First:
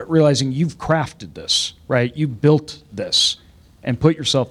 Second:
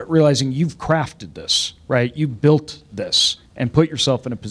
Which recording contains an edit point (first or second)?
second